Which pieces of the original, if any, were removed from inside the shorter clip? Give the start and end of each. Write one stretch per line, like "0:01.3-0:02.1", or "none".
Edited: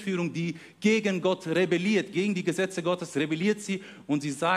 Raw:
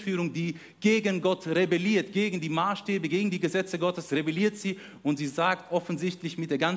0:02.1-0:03.1